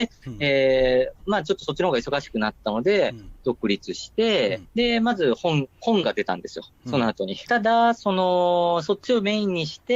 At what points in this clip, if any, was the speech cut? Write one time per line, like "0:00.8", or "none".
0:04.6
0:07.5